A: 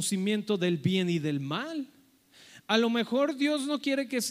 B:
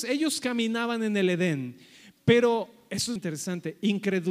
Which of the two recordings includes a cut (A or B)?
B